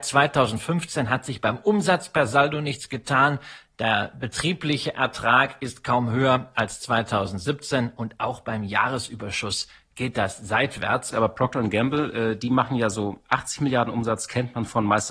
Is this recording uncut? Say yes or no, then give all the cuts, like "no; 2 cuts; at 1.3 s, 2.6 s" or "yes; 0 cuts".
no; 1 cut; at 11.1 s